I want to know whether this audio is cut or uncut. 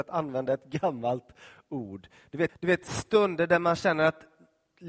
cut